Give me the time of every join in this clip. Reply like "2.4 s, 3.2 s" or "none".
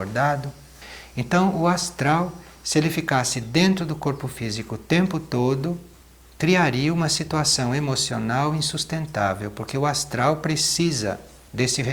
none